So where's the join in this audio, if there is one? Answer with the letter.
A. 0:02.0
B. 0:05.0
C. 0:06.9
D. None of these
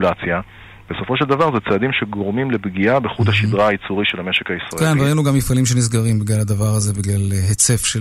D